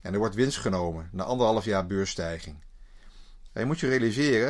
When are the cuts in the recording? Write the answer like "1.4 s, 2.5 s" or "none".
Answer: 3.5 s